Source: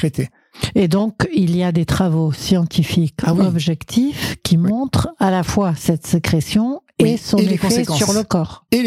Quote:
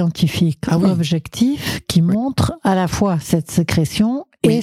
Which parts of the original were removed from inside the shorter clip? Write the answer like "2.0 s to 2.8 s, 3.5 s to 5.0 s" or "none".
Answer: none